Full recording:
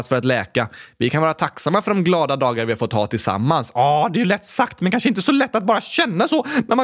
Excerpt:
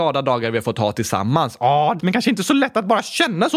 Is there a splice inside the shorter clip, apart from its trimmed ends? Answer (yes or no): yes